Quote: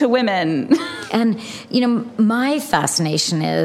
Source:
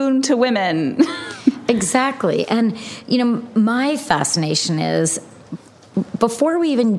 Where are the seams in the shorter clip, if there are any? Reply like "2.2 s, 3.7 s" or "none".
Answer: 1.1 s